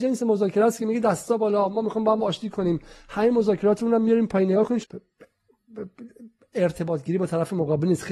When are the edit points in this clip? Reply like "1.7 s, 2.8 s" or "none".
4.8 s